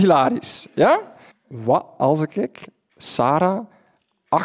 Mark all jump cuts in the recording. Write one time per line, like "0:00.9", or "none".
0:01.3